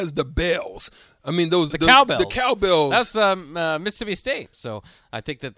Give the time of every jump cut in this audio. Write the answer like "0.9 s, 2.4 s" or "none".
1.7 s, 4.5 s